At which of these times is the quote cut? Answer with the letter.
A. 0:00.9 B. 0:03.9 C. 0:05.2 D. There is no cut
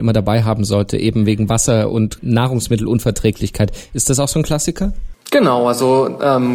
D